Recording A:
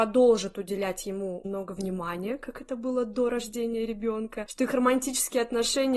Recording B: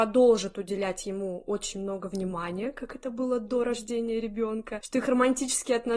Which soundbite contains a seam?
A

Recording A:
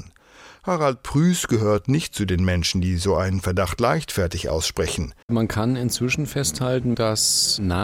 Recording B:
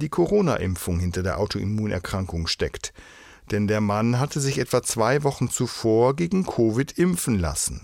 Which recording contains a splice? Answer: A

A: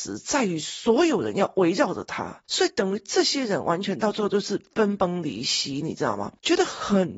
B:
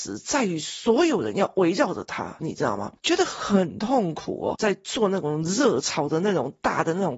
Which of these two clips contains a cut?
B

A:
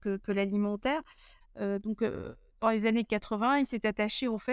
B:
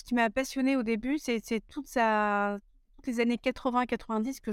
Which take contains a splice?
A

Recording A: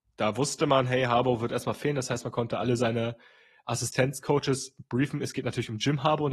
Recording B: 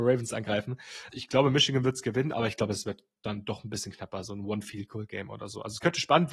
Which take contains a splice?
B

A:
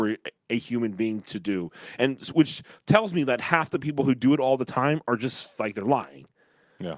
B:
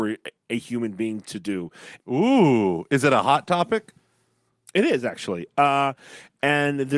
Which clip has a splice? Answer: B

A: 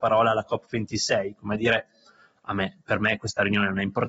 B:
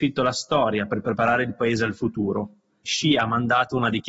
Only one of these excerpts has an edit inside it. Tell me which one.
B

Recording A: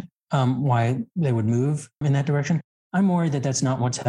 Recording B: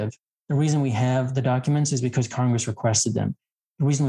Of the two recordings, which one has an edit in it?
A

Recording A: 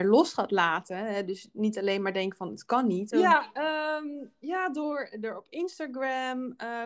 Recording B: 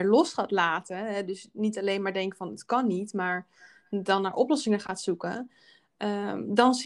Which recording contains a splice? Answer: A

